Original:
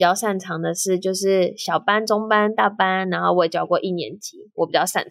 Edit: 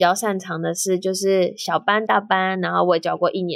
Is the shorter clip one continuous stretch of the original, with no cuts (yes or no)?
no